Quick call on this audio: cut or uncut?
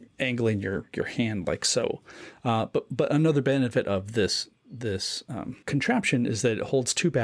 cut